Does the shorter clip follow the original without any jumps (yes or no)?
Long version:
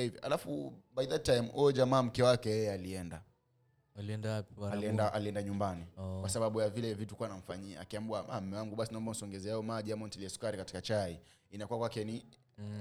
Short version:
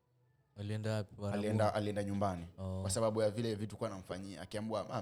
yes